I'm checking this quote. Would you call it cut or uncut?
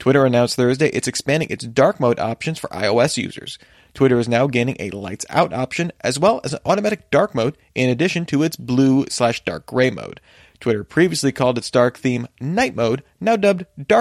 uncut